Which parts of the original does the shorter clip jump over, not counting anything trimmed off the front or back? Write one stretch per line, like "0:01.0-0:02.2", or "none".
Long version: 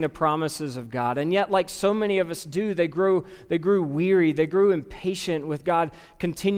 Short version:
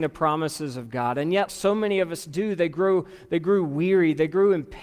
0:01.5-0:01.7